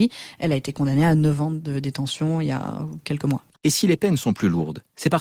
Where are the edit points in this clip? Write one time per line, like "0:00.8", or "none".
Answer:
none